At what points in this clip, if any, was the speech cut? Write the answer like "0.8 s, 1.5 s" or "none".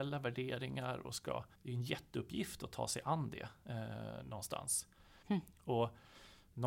1.5 s, 5.2 s

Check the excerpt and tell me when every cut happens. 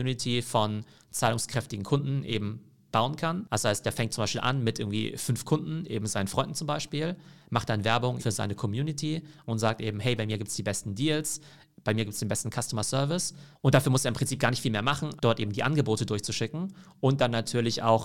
8.2 s, 13.5 s, 15.2 s

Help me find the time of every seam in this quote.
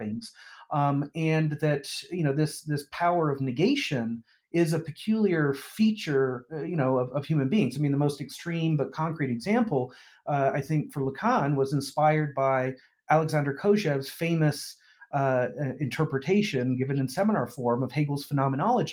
none

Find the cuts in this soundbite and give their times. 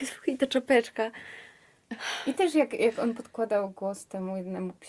none

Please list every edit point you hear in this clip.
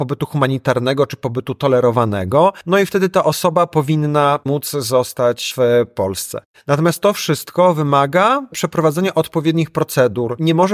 none

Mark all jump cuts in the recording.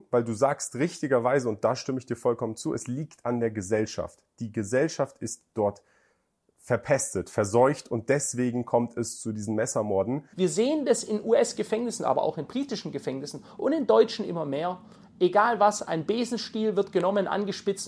10.3 s

